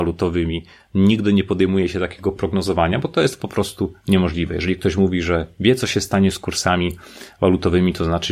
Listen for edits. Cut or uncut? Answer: uncut